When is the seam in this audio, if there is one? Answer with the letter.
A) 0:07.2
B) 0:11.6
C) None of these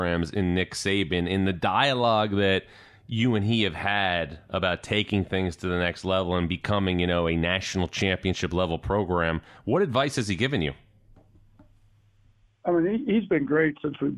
C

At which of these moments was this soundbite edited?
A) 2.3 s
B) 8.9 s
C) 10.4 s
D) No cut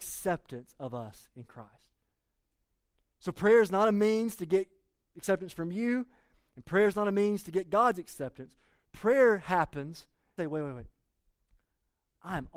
C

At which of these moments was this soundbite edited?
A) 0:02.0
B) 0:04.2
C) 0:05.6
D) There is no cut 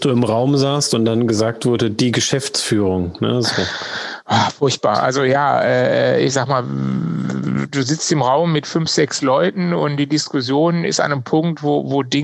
D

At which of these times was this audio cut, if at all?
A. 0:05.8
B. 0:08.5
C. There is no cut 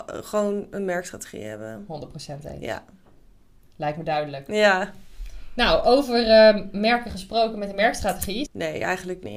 B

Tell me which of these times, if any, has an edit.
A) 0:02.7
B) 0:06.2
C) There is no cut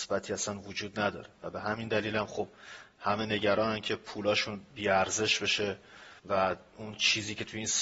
B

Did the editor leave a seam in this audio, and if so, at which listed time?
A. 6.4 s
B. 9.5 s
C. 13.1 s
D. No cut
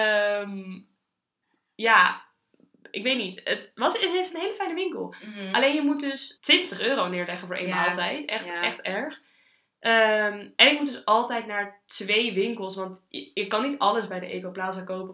A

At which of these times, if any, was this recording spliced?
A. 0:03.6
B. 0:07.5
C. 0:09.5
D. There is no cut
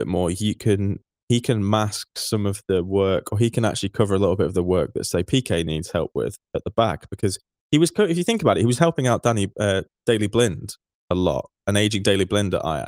D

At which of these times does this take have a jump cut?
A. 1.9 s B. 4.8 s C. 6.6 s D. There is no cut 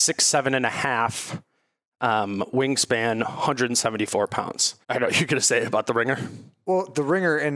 B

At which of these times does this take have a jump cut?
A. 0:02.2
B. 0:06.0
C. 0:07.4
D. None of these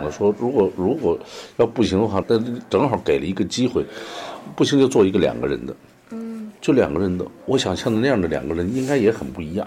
A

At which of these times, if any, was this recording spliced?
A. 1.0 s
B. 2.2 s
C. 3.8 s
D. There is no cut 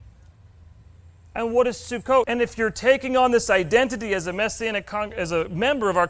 B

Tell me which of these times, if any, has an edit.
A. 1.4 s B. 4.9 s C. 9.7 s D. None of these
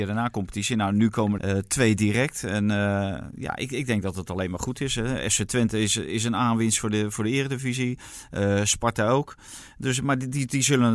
A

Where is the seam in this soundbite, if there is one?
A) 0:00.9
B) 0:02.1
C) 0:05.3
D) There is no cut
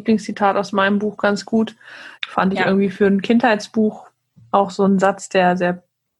B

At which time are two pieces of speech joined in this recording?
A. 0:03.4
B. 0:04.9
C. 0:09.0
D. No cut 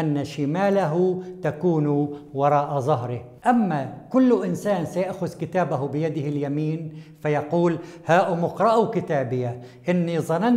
A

